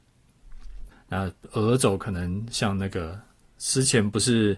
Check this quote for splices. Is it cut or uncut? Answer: cut